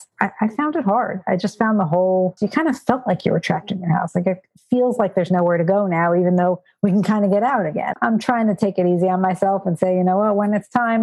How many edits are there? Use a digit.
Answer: 2